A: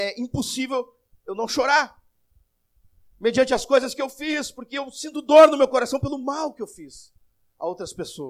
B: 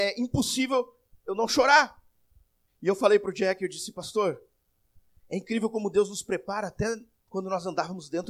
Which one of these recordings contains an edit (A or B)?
B